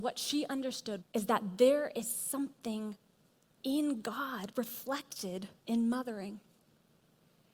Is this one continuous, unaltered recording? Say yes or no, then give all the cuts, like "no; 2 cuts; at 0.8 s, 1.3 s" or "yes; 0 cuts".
no; 2 cuts; at 1.0 s, 5.6 s